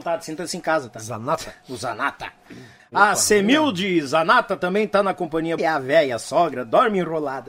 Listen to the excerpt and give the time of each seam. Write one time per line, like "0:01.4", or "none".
0:02.8
0:05.6